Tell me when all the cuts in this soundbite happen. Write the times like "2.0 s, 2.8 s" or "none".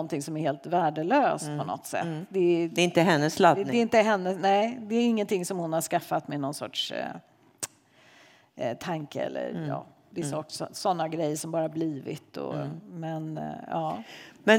none